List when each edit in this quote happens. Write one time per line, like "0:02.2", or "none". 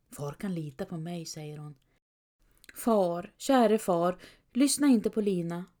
none